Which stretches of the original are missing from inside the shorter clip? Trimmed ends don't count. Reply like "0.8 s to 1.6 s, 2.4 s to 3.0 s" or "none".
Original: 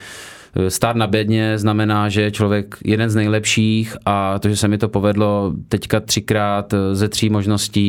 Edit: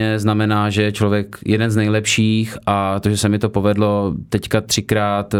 none